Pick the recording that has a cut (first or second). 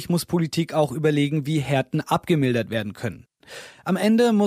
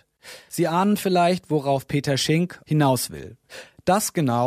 second